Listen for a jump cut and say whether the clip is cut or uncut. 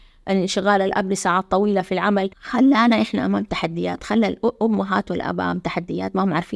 cut